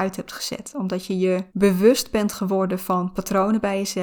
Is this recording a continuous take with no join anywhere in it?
no; 1 cut; at 1.5 s

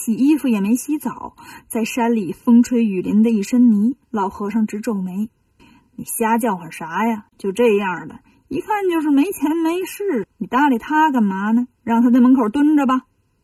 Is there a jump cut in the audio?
yes; 2 cuts; at 4.0 s, 11.7 s

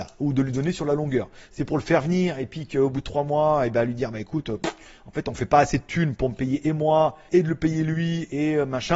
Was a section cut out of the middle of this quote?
yes; 1 cut; at 7.3 s

